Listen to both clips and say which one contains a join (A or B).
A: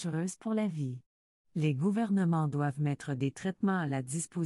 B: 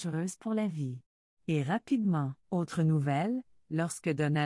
B